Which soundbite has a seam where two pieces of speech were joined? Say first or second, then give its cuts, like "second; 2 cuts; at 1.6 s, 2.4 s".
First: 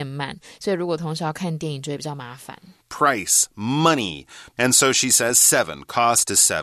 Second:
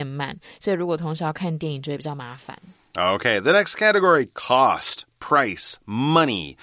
first; 2 cuts; at 2.8 s, 4.6 s